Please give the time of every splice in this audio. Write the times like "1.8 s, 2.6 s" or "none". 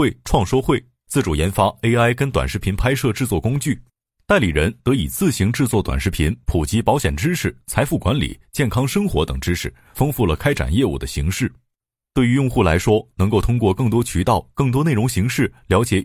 none